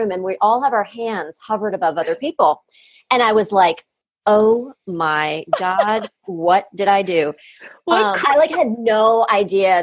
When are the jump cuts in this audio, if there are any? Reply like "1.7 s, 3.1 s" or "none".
8.2 s